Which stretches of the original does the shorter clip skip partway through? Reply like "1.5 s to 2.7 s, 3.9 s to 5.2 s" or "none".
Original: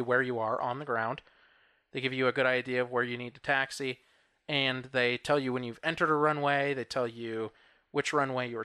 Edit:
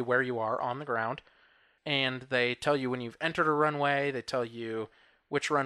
1.8 s to 4.4 s